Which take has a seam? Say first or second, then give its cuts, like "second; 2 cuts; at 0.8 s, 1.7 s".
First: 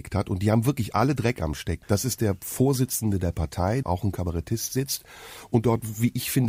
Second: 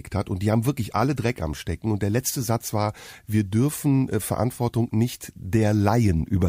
first; 2 cuts; at 1.8 s, 3.8 s